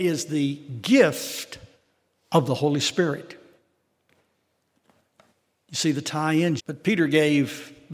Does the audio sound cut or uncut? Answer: cut